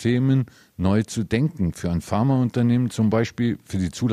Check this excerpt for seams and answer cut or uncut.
uncut